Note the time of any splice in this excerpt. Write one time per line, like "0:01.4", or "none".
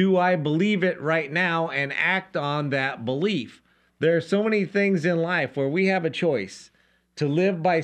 none